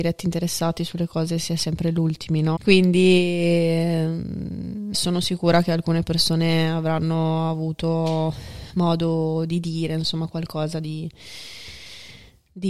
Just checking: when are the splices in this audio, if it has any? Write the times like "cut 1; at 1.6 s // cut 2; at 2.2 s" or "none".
cut 1; at 2.6 s // cut 2; at 4.9 s